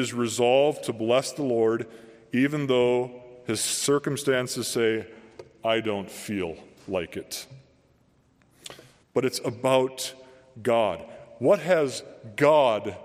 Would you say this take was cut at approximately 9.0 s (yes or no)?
yes